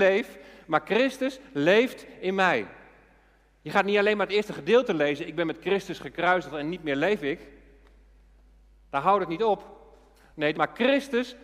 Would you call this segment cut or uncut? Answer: cut